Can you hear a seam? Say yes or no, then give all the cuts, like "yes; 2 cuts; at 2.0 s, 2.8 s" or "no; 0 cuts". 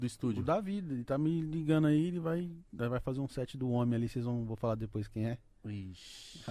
no; 0 cuts